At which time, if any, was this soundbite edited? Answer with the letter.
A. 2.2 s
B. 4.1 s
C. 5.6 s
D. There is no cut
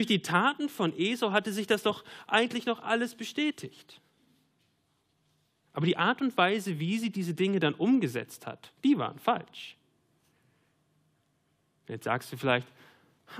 C